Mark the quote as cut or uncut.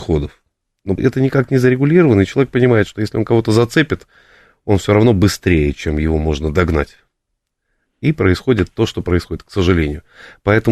cut